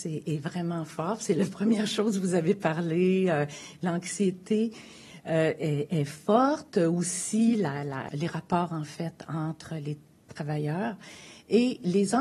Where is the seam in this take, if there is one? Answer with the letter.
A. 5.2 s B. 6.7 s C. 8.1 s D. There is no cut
C